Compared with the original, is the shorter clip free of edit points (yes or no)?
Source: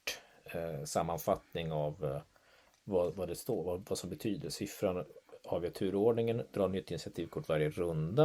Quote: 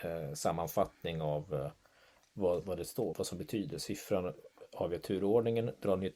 no